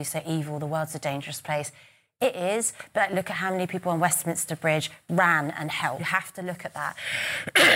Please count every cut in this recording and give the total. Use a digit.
1